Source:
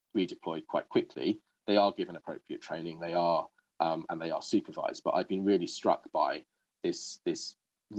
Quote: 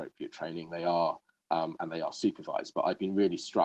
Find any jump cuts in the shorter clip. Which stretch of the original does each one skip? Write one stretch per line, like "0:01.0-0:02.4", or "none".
none